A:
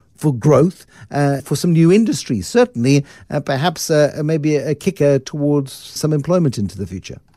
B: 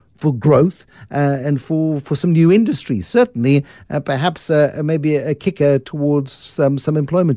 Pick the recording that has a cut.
A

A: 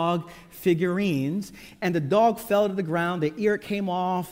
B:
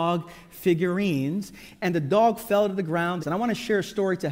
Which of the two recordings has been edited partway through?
B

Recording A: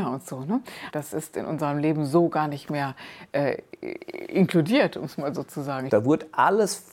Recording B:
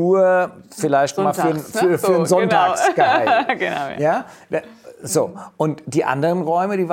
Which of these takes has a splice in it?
A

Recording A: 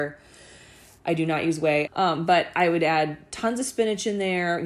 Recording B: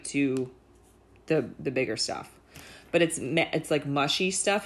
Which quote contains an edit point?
A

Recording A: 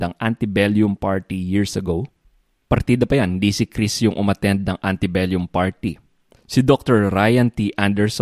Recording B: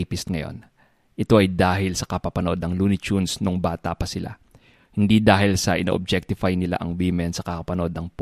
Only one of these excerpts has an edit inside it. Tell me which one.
A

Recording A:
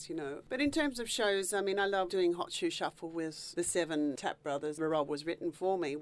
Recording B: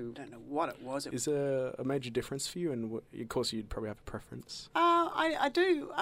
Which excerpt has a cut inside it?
B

